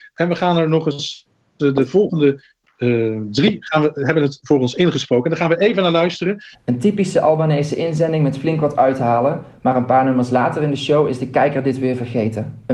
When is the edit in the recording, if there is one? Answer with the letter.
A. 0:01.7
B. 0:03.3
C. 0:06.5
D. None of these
C